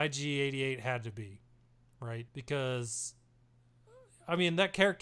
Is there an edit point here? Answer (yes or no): yes